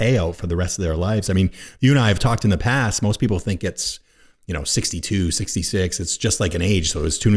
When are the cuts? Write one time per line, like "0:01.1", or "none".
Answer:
none